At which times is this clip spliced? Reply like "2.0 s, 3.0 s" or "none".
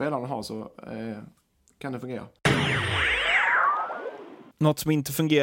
4.5 s